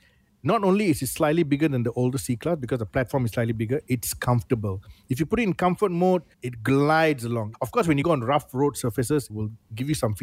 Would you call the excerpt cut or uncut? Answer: cut